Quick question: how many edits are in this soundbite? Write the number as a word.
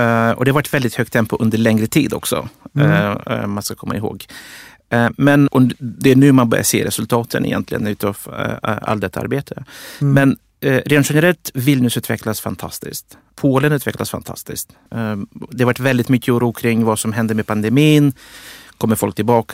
one